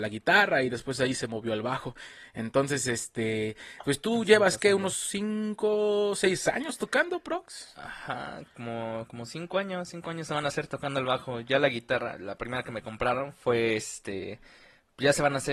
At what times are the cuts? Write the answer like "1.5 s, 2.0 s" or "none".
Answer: none